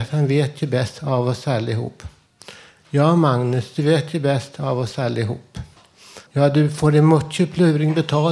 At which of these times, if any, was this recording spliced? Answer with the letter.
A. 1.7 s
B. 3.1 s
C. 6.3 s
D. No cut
C